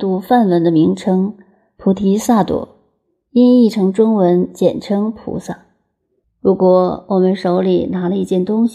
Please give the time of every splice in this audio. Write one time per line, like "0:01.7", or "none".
0:06.2